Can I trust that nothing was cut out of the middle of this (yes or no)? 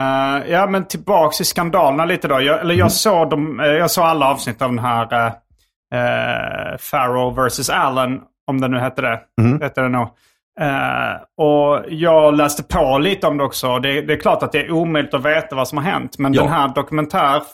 yes